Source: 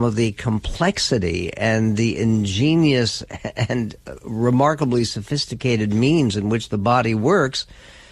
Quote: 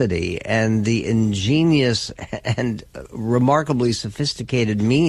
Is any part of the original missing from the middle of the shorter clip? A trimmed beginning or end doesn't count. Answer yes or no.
no